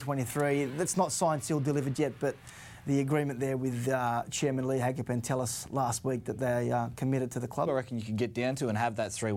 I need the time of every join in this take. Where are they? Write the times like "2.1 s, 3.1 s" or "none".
1.9 s, 7.7 s